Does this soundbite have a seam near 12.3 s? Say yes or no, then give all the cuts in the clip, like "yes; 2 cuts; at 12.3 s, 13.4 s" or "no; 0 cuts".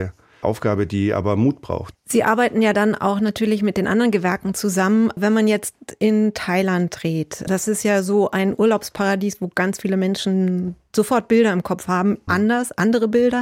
yes; 2 cuts; at 1.9 s, 12.3 s